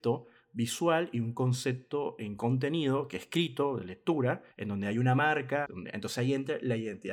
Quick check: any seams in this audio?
yes; 2 cuts; at 4.5 s, 5.6 s

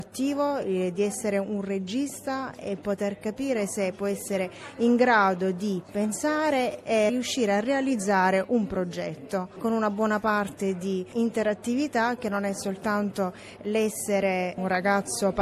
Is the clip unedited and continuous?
no; 1 cut; at 7.1 s

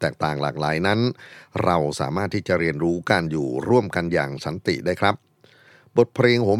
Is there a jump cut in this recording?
no; 0 cuts

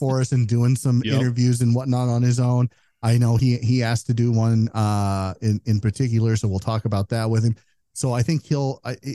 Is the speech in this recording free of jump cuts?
yes; 0 cuts

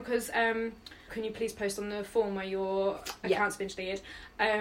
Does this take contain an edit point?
yes; 1 cut; at 1.1 s

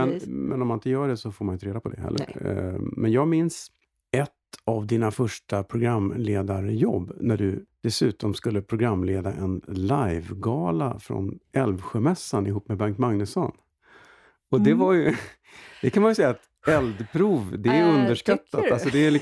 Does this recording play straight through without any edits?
yes; 0 cuts

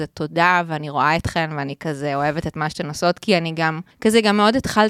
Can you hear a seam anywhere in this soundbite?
yes; 1 cut; at 3.9 s

